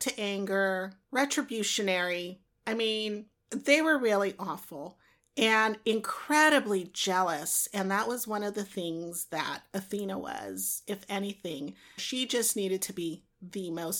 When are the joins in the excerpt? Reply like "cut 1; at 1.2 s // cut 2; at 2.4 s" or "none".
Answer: cut 1; at 12.0 s

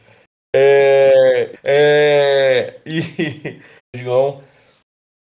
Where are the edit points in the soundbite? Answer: cut 1; at 1.5 s // cut 2; at 3.8 s

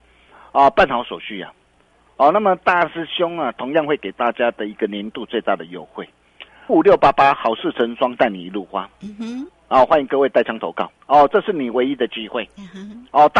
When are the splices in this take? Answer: cut 1; at 6.7 s // cut 2; at 9.5 s // cut 3; at 11.0 s

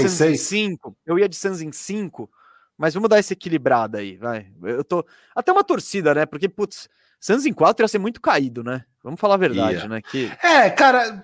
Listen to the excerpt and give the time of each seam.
none

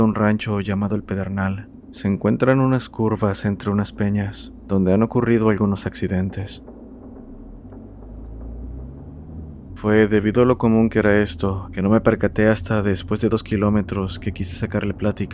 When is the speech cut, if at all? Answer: cut 1; at 9.7 s // cut 2; at 11.6 s

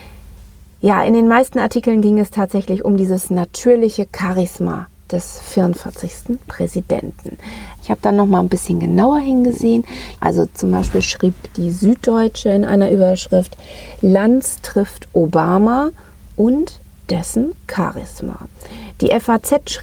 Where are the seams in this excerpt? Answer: cut 1; at 7.8 s // cut 2; at 10.2 s

